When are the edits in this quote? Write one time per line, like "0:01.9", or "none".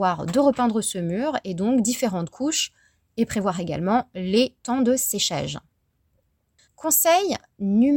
0:06.7